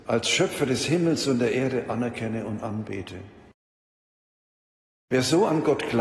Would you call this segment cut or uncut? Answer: uncut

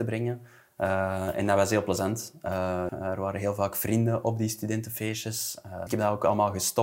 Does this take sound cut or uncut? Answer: cut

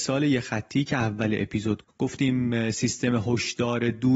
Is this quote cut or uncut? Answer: cut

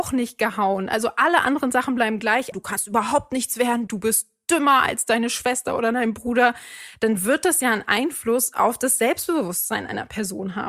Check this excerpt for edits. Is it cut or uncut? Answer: cut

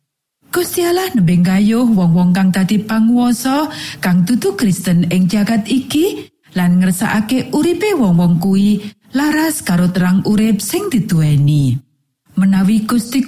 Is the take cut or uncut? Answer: cut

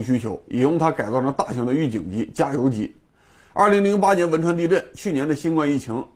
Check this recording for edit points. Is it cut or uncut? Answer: uncut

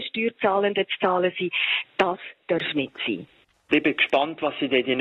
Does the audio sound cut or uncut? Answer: cut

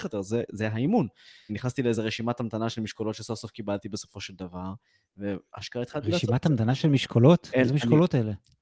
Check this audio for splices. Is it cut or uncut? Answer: cut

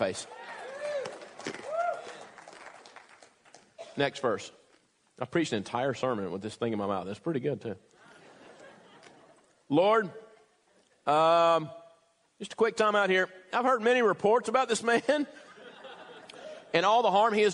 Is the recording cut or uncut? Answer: uncut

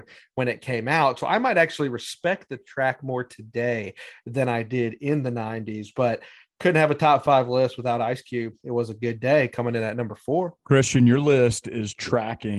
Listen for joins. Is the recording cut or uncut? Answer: cut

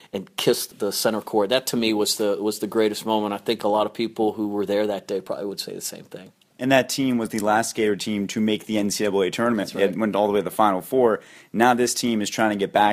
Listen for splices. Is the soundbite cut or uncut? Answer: uncut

